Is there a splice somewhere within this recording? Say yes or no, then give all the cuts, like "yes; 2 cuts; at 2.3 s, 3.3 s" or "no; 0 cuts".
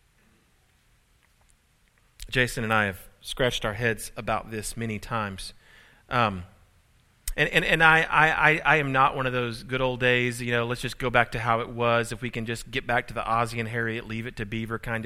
no; 0 cuts